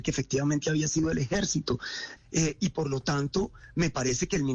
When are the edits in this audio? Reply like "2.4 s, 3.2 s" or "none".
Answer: 2.2 s

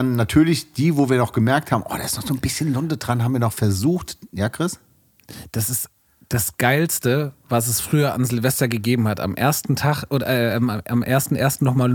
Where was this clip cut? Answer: none

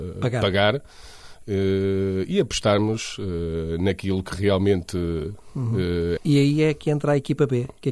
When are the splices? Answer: 6.2 s

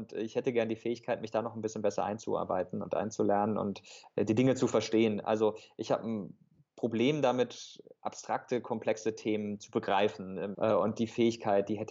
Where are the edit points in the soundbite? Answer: 10.5 s

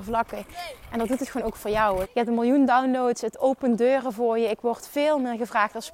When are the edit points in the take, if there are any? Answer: 2.0 s

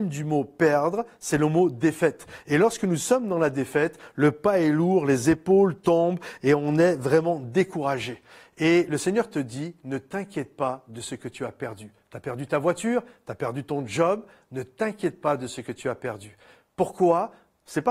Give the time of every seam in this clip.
none

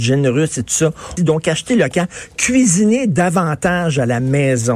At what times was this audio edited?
1.2 s

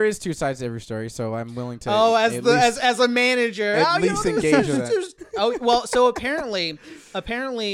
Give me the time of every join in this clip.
5.2 s

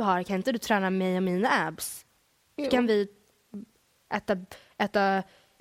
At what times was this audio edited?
none

